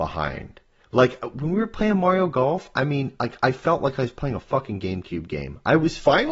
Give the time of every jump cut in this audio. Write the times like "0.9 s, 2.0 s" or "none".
none